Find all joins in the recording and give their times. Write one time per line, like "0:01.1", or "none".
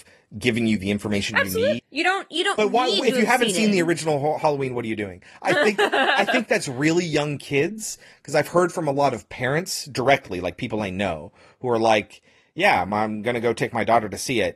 0:01.8